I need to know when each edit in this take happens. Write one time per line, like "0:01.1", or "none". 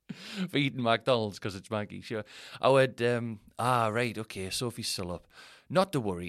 none